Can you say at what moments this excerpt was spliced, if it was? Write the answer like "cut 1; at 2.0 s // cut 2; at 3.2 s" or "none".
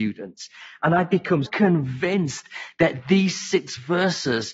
cut 1; at 1.5 s